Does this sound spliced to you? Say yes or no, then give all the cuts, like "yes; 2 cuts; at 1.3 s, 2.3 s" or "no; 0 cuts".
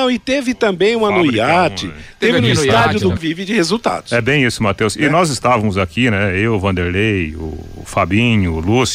yes; 1 cut; at 3.2 s